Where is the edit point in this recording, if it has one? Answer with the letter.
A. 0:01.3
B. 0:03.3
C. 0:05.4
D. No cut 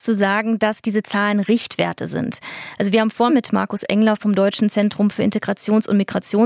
B